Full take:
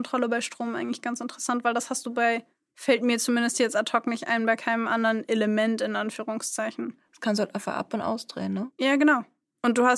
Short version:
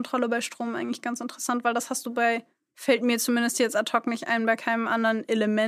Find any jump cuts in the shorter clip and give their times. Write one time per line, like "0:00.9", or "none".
none